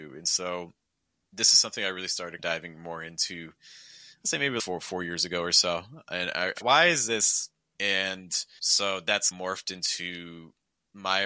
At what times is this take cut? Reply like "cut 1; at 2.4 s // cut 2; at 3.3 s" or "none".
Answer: cut 1; at 6.5 s